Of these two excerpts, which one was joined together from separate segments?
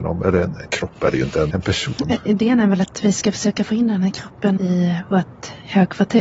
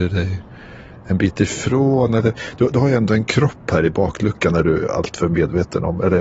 first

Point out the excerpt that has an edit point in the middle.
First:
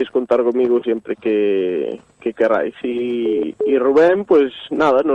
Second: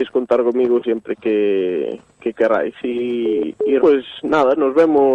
second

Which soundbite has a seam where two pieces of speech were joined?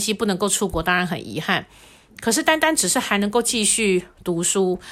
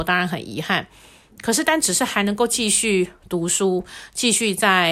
second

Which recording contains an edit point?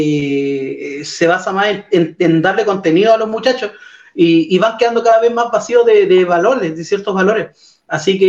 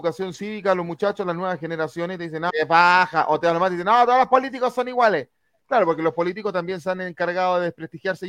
second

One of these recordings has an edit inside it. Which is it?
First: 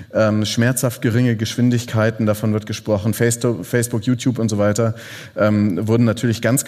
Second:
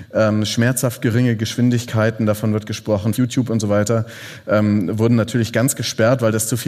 second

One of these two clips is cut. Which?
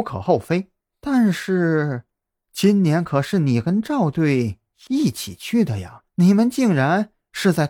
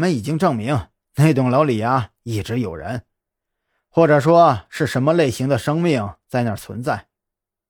first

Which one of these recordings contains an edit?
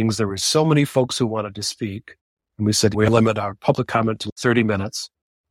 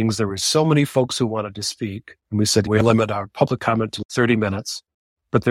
second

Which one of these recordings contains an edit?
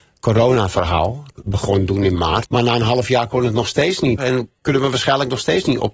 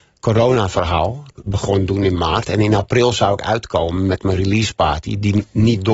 first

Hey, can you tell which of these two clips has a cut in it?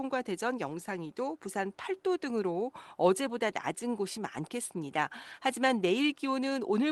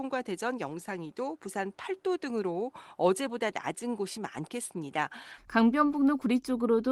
second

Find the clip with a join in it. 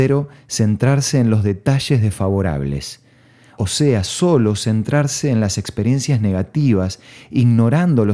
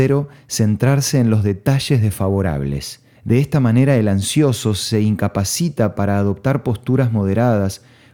second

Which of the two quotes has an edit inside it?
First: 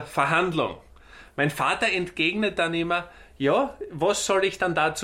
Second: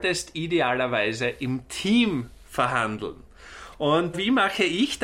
second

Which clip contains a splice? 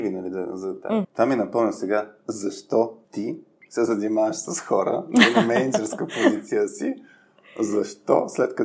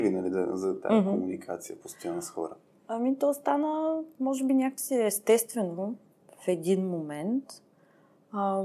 first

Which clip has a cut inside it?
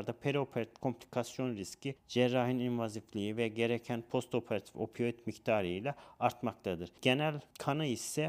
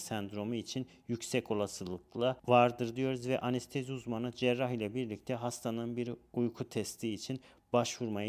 first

